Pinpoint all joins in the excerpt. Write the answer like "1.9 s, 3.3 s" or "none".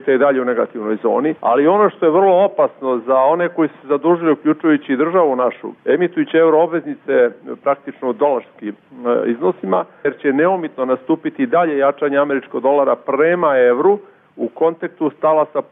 1.4 s, 5.8 s, 10.0 s